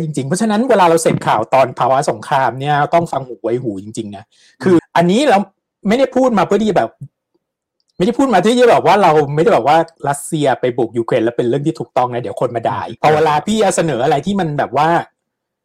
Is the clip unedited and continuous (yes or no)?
no